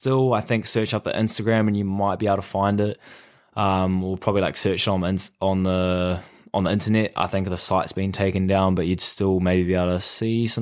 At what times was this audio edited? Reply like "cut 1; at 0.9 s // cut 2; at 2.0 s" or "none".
none